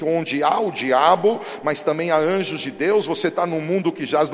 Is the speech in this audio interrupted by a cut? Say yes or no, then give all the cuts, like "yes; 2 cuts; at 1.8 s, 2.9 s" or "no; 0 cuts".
no; 0 cuts